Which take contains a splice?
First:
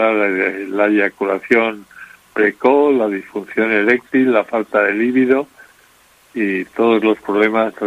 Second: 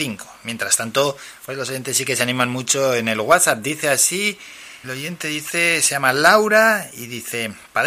second; 1 cut; at 4.8 s

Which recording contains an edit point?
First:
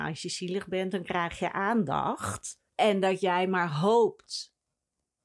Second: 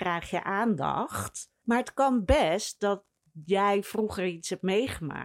first; 1 cut; at 2.7 s

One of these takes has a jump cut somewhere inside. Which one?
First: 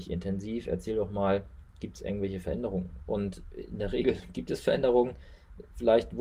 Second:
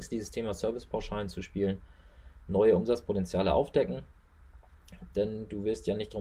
second; 1 cut; at 5.1 s

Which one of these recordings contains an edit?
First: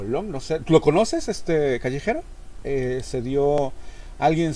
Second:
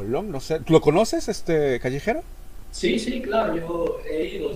first; 1 cut; at 2.6 s

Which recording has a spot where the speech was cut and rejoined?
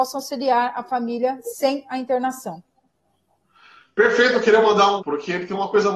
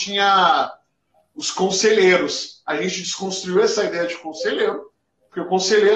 first; 1 cut; at 5.0 s

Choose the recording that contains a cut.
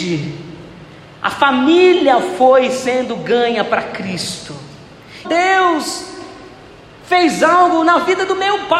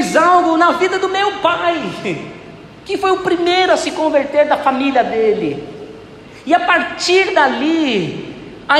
first; 1 cut; at 5.2 s

